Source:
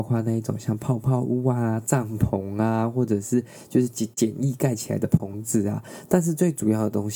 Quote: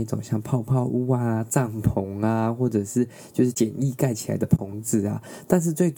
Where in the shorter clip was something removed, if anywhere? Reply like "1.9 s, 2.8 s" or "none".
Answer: 3.5 s